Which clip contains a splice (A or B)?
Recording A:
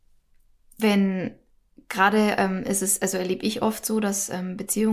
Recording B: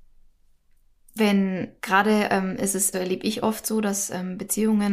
B